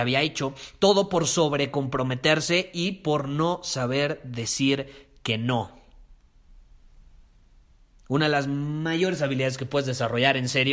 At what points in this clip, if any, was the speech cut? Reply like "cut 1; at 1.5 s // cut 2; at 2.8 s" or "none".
none